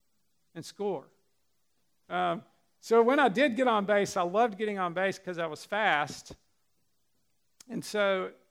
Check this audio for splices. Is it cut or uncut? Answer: cut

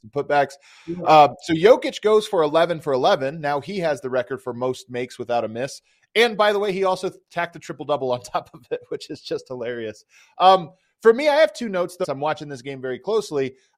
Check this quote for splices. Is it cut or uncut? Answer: cut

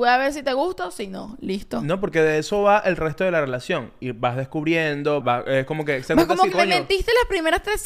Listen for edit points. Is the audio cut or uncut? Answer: cut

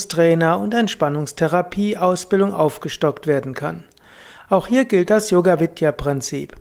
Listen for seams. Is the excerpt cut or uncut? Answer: uncut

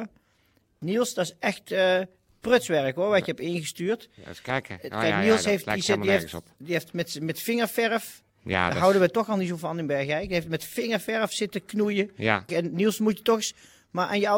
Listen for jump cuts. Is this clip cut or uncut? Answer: cut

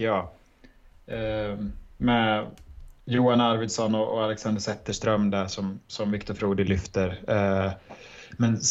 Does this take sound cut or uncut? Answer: uncut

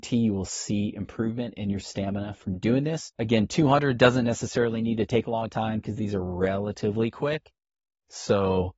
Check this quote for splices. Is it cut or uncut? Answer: cut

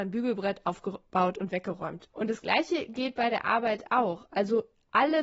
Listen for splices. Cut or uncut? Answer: cut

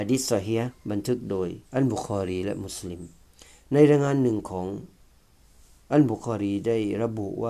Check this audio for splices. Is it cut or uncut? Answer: cut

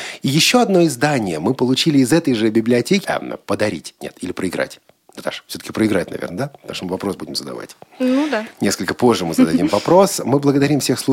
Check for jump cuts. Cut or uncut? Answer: cut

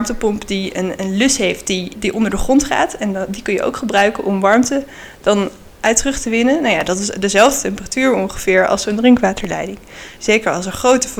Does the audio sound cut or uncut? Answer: cut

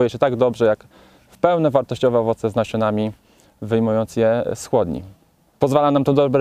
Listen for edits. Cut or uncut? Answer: cut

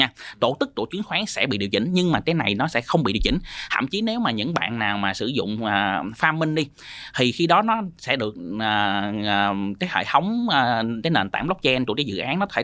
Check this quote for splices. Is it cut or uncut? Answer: cut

